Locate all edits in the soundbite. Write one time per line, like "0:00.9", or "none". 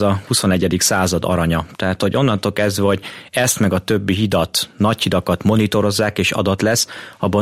none